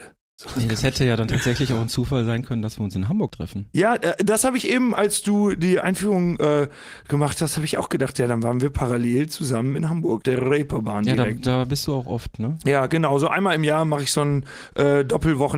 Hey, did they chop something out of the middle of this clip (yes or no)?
yes